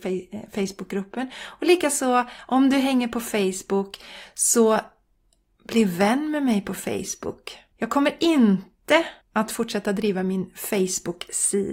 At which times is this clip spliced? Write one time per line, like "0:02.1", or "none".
0:07.7
0:09.2